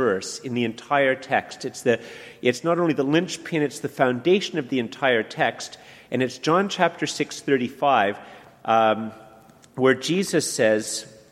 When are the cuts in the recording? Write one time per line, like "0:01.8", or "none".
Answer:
none